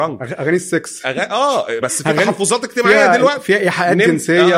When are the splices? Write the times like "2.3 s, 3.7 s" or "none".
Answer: 1.8 s